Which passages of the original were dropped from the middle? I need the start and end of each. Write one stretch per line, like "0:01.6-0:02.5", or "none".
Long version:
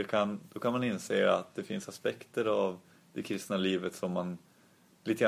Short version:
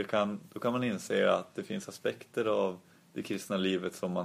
none